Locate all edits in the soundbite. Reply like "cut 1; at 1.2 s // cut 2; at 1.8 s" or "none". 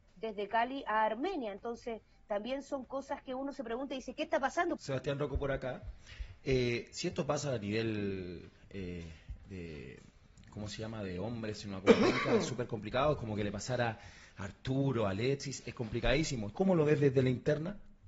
cut 1; at 4.8 s // cut 2; at 16.5 s